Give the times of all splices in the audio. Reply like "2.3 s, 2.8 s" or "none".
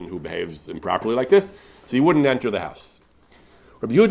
none

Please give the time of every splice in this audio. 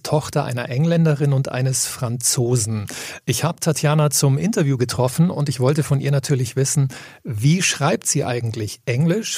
none

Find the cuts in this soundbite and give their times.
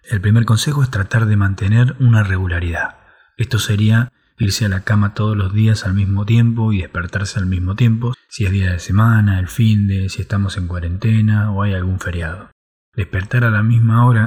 8.1 s

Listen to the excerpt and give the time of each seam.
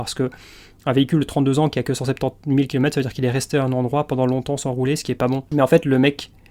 none

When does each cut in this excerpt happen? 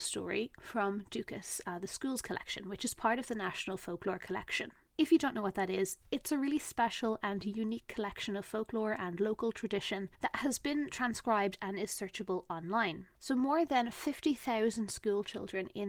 13.1 s

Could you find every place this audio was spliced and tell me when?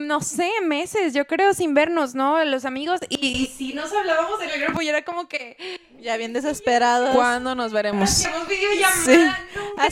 none

